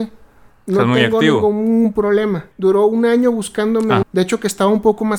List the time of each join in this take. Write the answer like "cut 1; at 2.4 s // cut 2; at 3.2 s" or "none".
cut 1; at 2.5 s // cut 2; at 4.0 s